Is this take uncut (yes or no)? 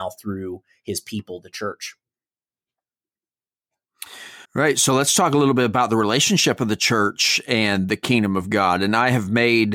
no